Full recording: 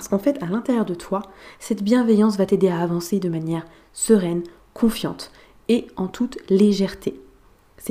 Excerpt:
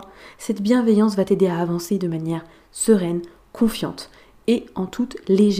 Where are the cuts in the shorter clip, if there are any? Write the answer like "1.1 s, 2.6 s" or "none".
none